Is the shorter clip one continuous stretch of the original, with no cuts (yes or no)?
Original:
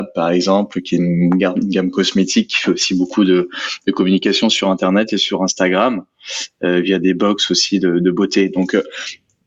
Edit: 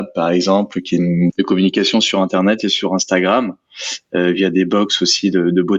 no